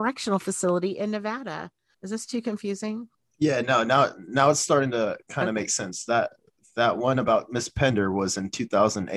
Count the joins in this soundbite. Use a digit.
1